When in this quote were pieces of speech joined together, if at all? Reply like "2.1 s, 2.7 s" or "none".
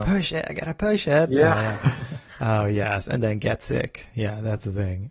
none